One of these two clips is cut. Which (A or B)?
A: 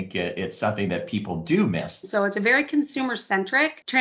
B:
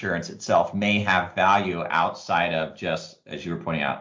A